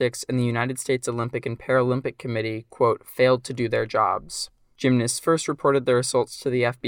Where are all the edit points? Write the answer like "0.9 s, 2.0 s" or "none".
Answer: none